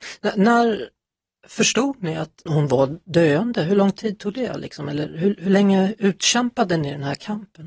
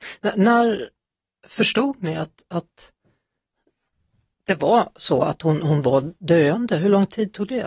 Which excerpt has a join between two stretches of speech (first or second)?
first